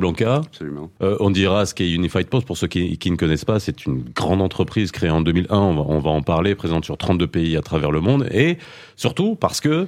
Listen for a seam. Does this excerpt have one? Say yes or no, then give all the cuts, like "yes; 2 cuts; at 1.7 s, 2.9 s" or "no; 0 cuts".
yes; 1 cut; at 1.0 s